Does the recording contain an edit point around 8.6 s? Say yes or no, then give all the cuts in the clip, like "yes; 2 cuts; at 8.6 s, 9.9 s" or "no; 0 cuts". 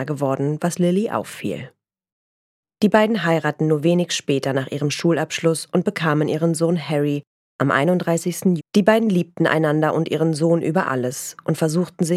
yes; 2 cuts; at 2.6 s, 8.6 s